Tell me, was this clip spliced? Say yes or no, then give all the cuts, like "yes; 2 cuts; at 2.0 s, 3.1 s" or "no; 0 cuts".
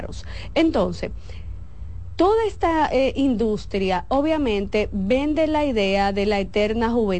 no; 0 cuts